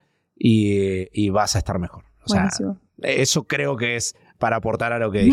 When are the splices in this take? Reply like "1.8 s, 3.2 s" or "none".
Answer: none